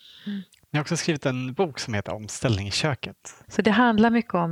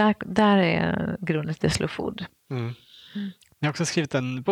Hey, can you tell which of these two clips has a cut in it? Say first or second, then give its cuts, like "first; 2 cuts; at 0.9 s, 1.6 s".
first; 1 cut; at 3.4 s